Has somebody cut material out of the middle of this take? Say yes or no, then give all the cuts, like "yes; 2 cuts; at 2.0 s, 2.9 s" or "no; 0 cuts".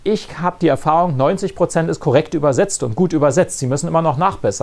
no; 0 cuts